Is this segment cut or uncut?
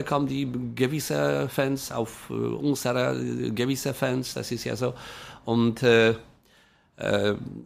uncut